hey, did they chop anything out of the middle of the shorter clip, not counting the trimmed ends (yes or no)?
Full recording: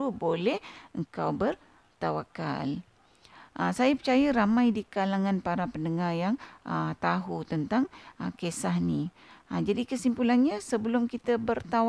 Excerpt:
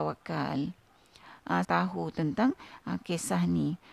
yes